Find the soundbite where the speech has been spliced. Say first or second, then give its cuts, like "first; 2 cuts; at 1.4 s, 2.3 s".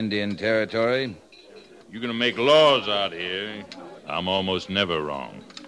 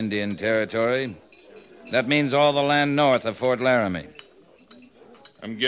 first; 2 cuts; at 1.8 s, 4.0 s